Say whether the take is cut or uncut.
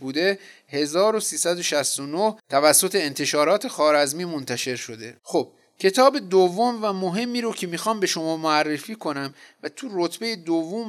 cut